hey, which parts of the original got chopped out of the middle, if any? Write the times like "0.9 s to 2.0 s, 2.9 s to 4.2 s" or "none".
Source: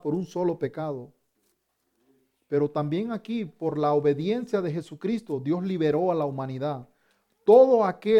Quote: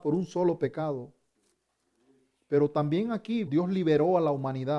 3.5 s to 5.4 s